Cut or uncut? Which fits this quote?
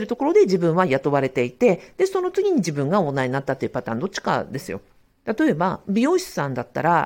cut